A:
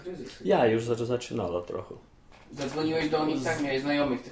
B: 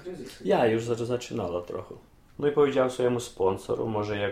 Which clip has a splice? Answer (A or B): B